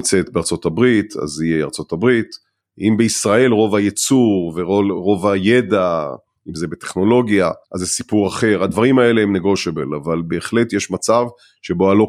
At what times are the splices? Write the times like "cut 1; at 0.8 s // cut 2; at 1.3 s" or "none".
cut 1; at 2.6 s // cut 2; at 7.6 s